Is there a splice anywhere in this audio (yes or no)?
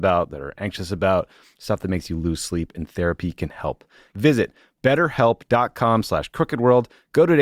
yes